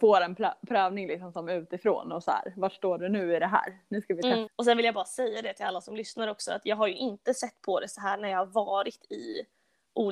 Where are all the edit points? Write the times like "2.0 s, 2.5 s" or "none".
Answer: 4.5 s